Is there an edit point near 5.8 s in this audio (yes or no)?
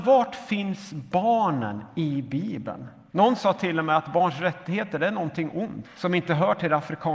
yes